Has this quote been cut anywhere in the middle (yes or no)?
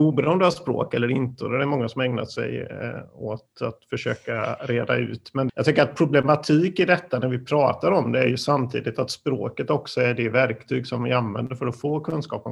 yes